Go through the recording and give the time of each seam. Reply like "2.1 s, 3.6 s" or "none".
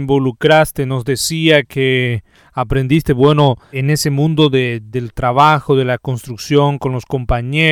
none